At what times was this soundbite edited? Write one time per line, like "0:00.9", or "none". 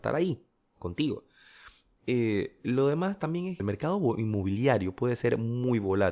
0:03.6